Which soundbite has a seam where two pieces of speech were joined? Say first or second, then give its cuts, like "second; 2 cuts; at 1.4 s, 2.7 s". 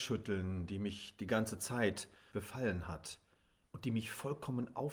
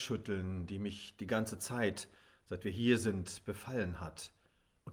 first; 1 cut; at 2.3 s